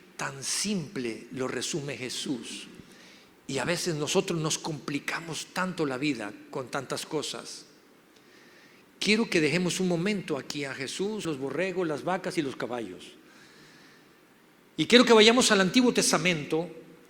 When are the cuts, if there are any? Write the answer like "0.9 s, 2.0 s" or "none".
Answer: 11.2 s